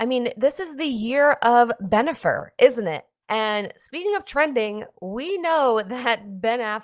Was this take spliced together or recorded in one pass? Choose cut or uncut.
cut